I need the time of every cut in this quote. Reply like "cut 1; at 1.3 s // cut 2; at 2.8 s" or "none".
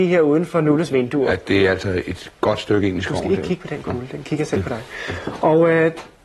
none